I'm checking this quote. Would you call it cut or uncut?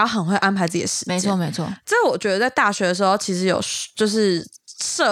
uncut